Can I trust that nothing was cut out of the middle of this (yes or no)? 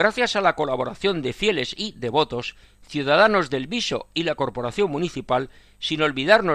yes